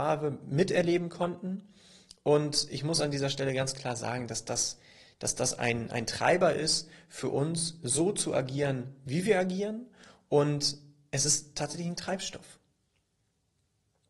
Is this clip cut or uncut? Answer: uncut